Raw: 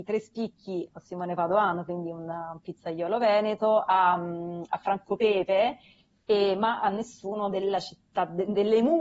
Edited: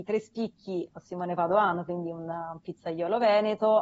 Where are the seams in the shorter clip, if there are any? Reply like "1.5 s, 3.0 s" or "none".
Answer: none